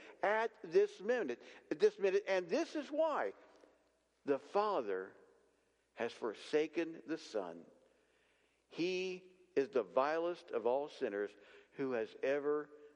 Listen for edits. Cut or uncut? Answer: uncut